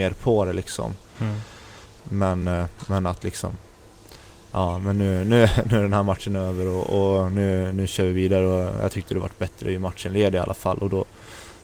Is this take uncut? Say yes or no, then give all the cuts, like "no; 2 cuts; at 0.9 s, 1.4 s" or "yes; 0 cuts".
yes; 0 cuts